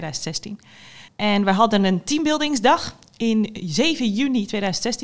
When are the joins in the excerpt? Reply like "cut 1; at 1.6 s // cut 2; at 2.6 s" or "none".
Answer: cut 1; at 1.1 s